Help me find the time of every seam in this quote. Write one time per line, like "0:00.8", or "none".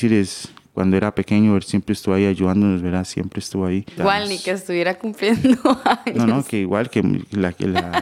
0:04.0